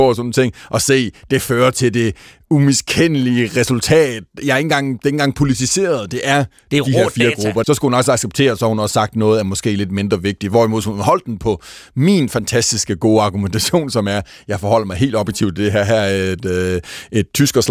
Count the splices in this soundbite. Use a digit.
1